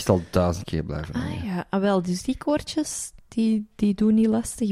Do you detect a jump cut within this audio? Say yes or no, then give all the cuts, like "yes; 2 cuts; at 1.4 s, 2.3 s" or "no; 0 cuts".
no; 0 cuts